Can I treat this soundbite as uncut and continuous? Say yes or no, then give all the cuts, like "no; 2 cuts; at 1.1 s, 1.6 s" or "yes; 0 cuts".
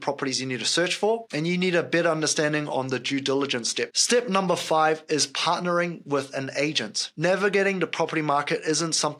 no; 1 cut; at 3.9 s